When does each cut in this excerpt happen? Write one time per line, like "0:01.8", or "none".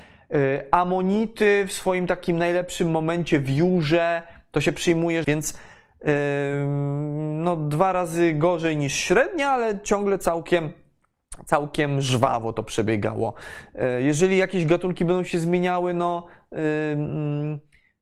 0:05.2